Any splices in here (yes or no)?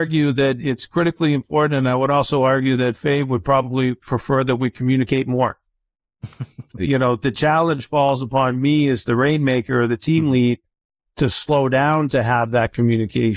yes